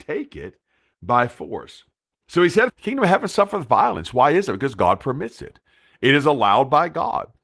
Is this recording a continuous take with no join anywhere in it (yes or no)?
no